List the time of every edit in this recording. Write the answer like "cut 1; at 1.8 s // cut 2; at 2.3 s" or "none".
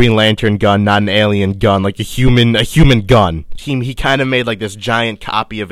cut 1; at 3.6 s